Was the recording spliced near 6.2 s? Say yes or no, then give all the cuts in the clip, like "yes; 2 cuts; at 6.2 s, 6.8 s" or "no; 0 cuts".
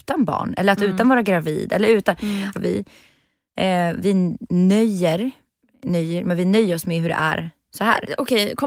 yes; 2 cuts; at 2.5 s, 6.2 s